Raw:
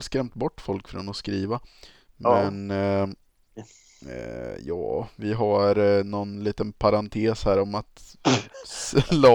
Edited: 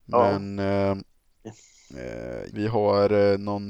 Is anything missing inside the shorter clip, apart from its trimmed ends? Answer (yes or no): yes